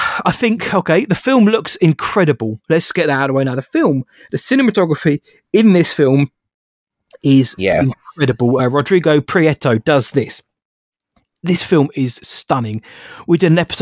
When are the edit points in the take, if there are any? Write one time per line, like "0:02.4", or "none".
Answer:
none

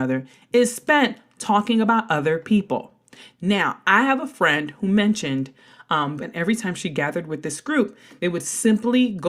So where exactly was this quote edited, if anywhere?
0:06.2

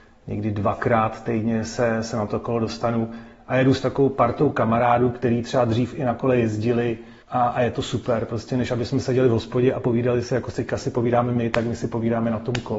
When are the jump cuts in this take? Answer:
0:07.2

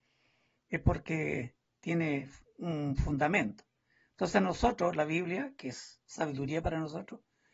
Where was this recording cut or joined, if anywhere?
none

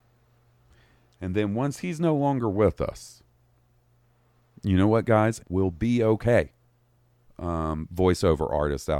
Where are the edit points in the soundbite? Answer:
0:05.4
0:07.2

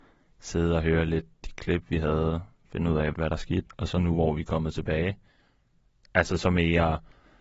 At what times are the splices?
0:03.1

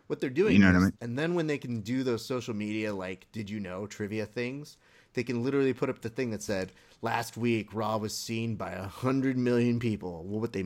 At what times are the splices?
0:00.9

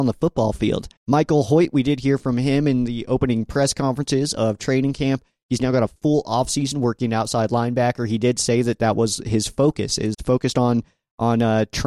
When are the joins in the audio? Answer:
0:01.0
0:10.1

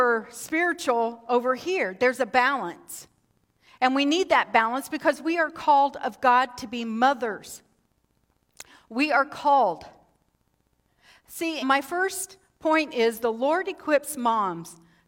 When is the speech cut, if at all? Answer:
0:11.6

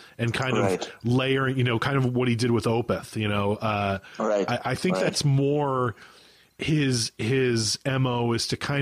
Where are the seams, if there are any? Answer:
none

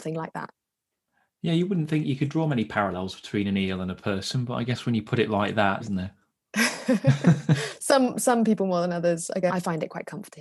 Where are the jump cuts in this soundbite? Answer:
0:05.8
0:09.5

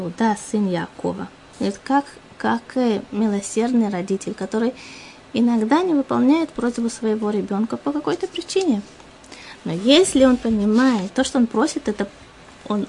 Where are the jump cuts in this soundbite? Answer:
0:01.5
0:11.1

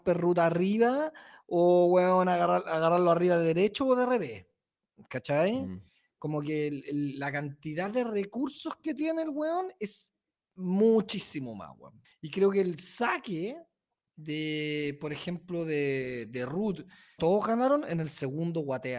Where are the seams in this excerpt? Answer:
0:12.0
0:17.2

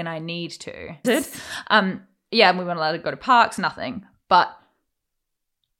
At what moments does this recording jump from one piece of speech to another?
0:01.0

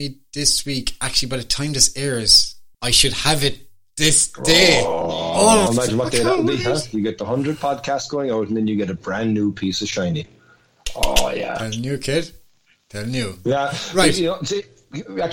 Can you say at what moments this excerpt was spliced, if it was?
0:02.7
0:05.7

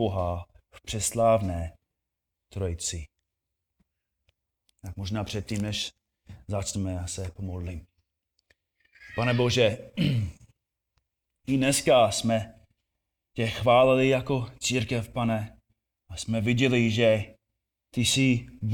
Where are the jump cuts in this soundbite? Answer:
none

